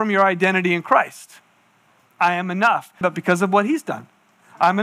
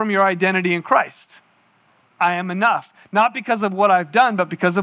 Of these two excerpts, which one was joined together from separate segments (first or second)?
first